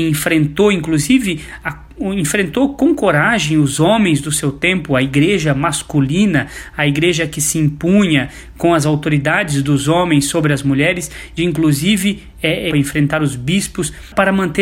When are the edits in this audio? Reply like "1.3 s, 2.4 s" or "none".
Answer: 1.6 s, 11.4 s, 12.7 s